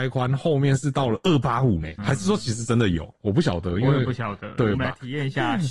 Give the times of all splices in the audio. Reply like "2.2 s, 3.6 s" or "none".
2.0 s, 4.7 s

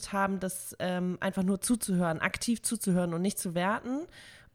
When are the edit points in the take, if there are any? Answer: none

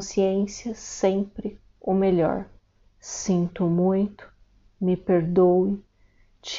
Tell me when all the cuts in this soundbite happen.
2.8 s

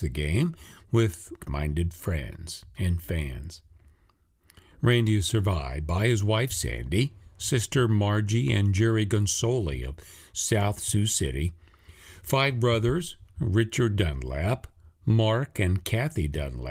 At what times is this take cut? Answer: 1.4 s

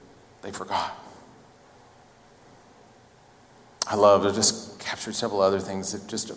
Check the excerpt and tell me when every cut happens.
none

